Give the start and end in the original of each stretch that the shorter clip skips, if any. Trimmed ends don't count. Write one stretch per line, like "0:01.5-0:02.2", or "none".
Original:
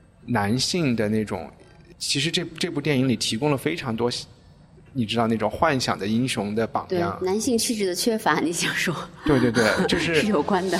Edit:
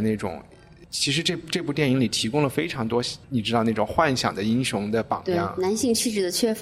0:04.3-0:04.9